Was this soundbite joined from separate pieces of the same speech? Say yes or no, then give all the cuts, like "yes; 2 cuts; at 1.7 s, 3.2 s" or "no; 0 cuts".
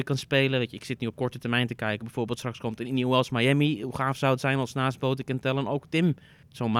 no; 0 cuts